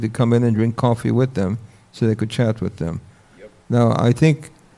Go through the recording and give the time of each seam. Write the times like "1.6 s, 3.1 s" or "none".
none